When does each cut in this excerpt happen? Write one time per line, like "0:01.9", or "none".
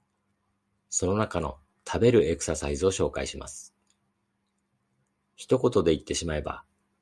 none